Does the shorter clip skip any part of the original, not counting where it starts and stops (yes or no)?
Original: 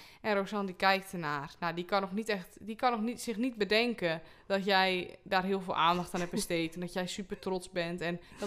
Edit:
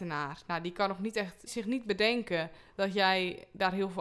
yes